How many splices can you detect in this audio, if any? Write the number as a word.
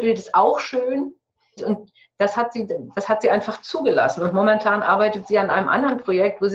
one